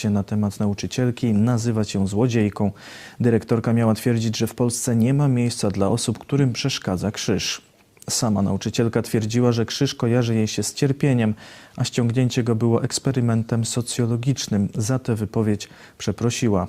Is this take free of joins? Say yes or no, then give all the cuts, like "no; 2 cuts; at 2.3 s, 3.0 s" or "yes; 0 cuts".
yes; 0 cuts